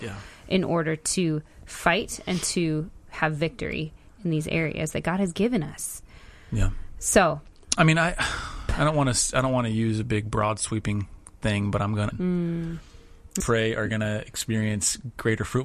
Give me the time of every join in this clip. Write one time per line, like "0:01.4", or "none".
0:12.1
0:13.4